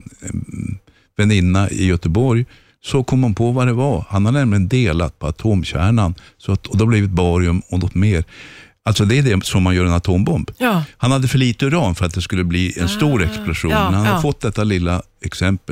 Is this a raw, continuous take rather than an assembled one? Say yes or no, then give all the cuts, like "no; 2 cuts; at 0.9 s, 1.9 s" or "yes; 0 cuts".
yes; 0 cuts